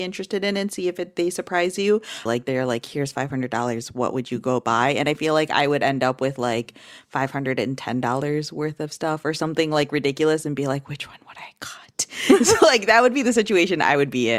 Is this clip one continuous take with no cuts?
no; 1 cut; at 2.3 s

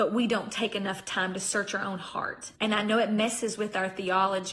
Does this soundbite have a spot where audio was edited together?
yes; 1 cut; at 2.6 s

